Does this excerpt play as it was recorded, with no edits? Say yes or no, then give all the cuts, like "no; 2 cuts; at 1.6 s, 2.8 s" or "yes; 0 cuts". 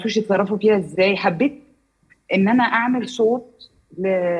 yes; 0 cuts